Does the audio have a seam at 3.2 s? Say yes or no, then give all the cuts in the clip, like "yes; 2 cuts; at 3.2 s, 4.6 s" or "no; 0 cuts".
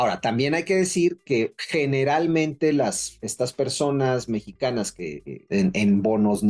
no; 1 cut; at 5.5 s